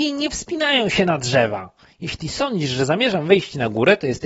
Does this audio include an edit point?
no; 0 cuts

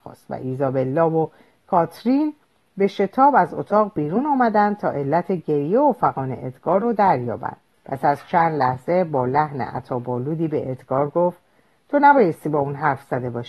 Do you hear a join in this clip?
yes; 1 cut; at 7.7 s

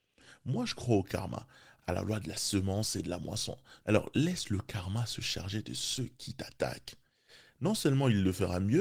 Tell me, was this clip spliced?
yes; 1 cut; at 3.8 s

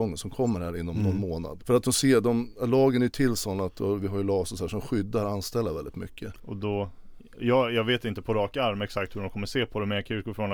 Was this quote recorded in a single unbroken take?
no; 2 cuts; at 1.6 s, 6.4 s

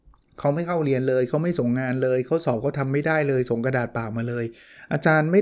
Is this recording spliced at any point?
no; 0 cuts

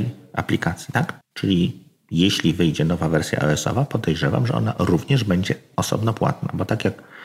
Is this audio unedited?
no; 1 cut; at 1.2 s

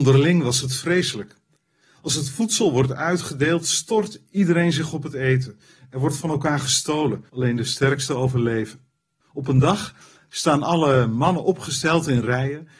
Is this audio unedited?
no; 2 cuts; at 7.3 s, 9.1 s

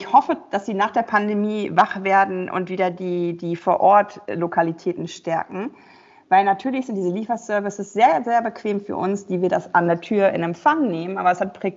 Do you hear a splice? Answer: no; 0 cuts

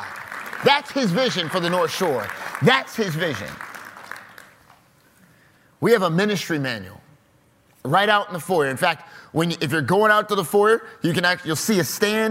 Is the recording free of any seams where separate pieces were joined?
yes; 0 cuts

